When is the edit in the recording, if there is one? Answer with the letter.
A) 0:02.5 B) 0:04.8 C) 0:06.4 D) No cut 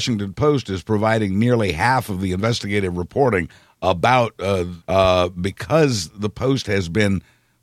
B